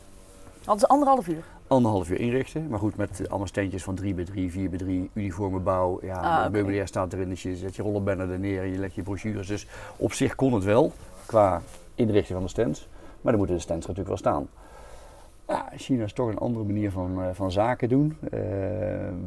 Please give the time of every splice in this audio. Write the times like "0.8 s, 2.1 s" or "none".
none